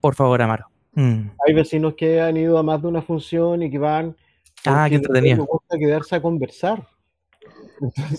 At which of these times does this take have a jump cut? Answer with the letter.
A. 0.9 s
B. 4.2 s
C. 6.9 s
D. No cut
A